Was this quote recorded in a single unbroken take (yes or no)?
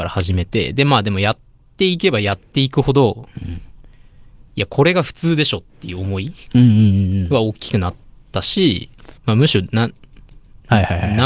no